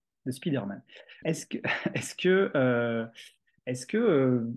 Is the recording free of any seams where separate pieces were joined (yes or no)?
no